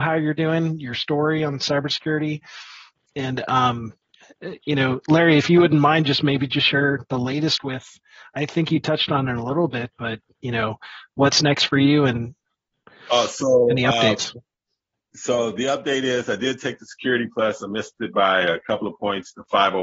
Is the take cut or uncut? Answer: uncut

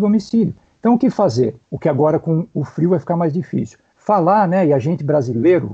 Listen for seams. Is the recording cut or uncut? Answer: cut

